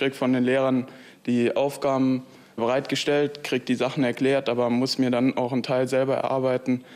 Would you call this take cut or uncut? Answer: uncut